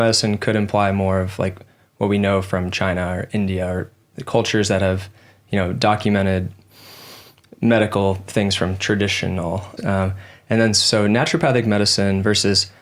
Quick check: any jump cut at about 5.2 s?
no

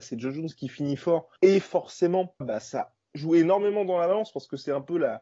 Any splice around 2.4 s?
yes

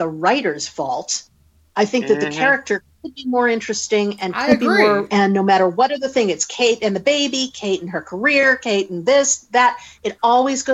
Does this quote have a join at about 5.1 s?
yes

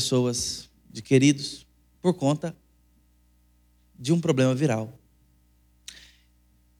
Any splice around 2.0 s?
yes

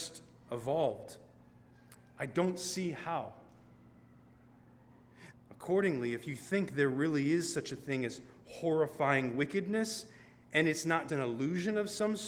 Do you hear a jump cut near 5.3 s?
yes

